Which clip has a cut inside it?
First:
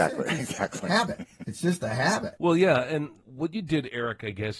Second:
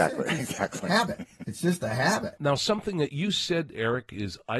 second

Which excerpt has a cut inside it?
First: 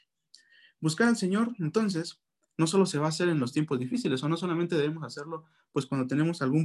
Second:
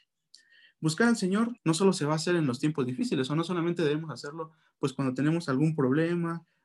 second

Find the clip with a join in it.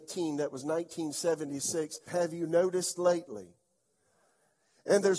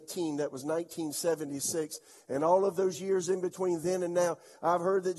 first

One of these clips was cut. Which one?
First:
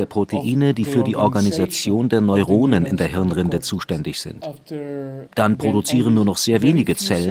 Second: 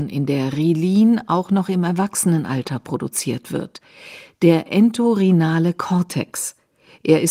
first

